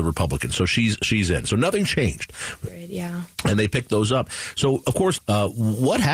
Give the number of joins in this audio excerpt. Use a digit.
2